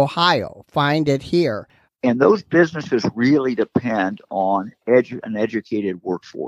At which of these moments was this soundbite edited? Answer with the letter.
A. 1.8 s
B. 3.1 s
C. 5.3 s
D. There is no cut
A